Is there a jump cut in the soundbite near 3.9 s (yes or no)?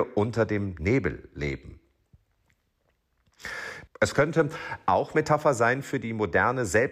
yes